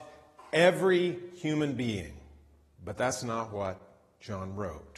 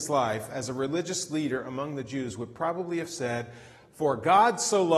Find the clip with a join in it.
first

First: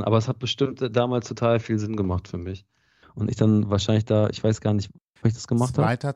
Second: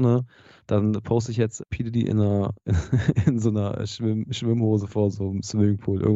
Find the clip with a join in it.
first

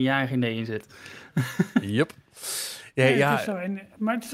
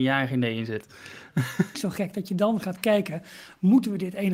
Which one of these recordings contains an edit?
second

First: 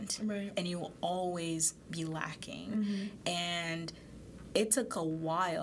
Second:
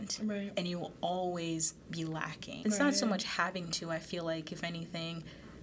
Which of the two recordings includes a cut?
second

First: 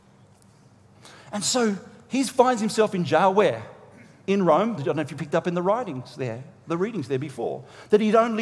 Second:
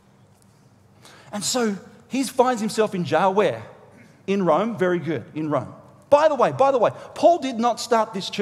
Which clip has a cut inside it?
first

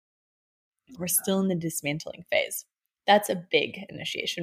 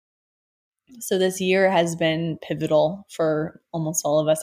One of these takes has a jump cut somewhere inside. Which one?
first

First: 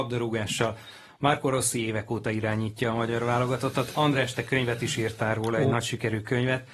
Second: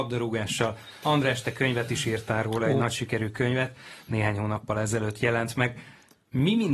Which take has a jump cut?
second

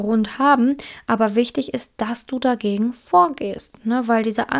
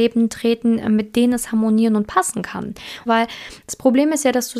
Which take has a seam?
second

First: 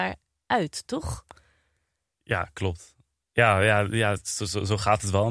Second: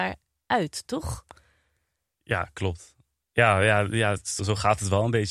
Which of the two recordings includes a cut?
second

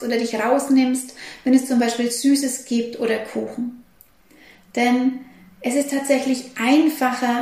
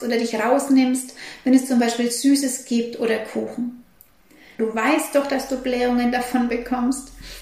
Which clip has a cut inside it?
second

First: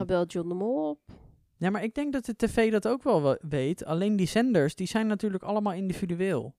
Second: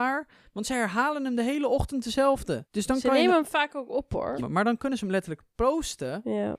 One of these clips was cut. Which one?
second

